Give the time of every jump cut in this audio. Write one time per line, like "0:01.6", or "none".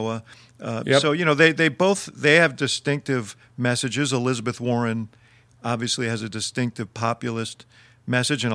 none